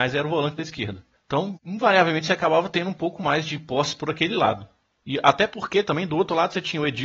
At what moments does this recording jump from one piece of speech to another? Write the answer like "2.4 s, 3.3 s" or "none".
1.1 s